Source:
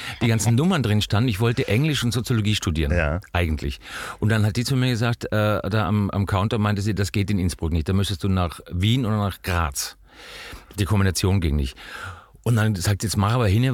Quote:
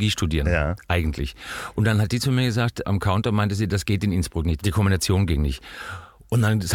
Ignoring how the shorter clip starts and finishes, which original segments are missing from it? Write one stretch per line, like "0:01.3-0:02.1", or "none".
0:05.3-0:06.1
0:07.9-0:10.7